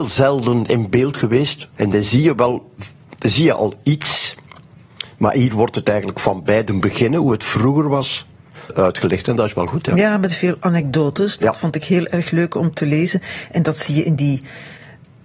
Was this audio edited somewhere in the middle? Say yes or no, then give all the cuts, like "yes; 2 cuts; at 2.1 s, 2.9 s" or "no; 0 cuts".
yes; 2 cuts; at 1.7 s, 8.7 s